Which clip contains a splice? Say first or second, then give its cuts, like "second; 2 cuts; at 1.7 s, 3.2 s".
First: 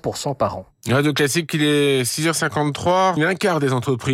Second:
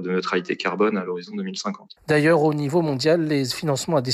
first; 1 cut; at 3.2 s